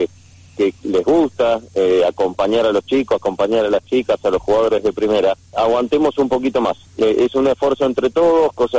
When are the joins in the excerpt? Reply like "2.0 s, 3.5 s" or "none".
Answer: 5.5 s, 6.9 s